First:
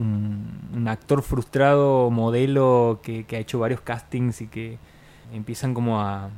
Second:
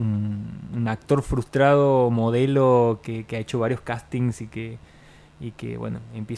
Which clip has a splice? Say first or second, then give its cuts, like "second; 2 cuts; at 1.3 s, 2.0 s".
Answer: first; 1 cut; at 5.2 s